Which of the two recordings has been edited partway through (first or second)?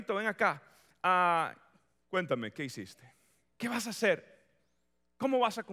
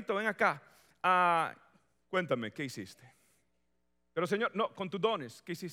first